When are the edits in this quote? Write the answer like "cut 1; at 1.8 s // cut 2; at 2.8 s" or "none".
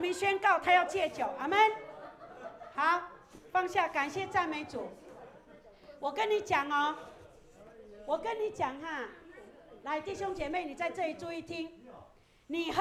none

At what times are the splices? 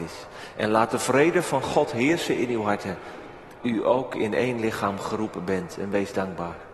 cut 1; at 3.6 s

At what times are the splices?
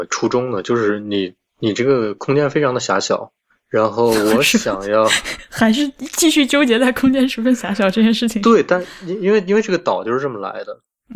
cut 1; at 3.5 s

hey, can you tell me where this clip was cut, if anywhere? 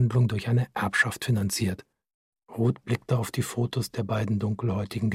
cut 1; at 2.3 s

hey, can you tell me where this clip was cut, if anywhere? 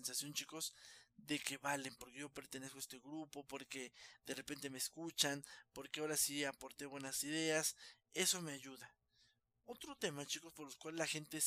none

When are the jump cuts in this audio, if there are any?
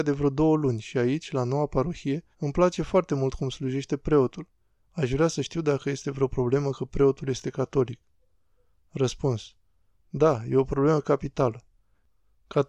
cut 1; at 2.3 s // cut 2; at 4.8 s

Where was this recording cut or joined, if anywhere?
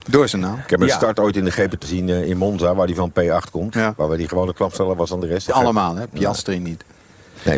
cut 1; at 1.8 s // cut 2; at 3.7 s // cut 3; at 5.5 s

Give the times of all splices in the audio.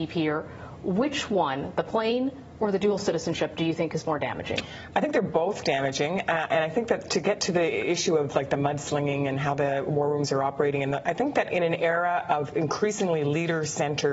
cut 1; at 11.0 s

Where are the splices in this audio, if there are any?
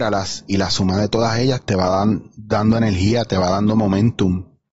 none

